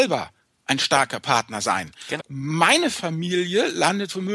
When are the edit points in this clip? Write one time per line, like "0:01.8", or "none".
0:02.2